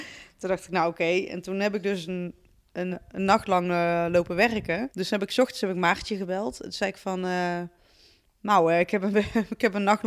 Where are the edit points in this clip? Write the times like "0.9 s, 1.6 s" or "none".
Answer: 2.9 s, 4.9 s

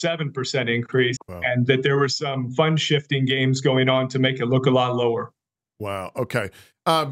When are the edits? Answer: 1.2 s

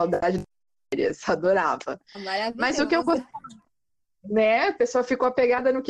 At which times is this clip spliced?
none

